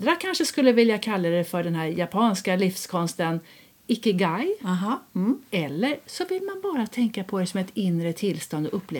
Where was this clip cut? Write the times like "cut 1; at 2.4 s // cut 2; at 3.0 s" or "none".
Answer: none